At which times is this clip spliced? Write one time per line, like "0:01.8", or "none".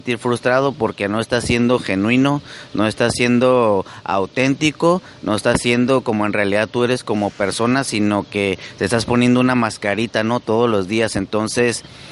none